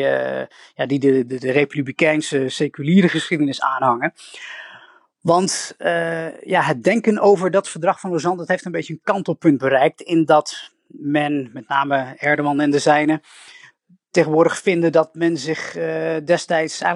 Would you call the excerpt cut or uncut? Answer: uncut